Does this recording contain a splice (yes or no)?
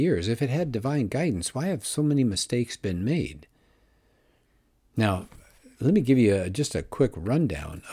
no